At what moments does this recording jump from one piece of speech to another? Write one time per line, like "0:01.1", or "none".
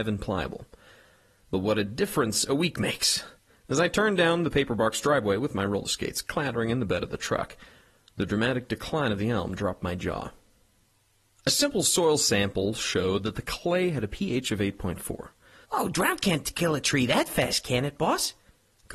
0:11.3
0:15.6